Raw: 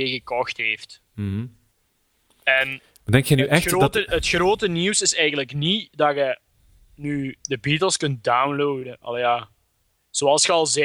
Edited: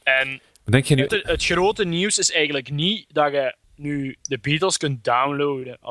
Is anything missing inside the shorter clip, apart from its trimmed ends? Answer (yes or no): yes